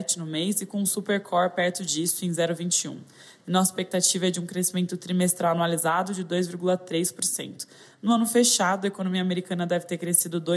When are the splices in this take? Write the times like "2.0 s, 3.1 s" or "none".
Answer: 3.4 s